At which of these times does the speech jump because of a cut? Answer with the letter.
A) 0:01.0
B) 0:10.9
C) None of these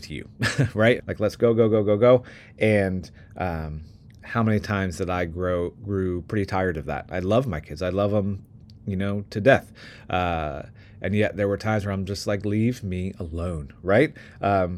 A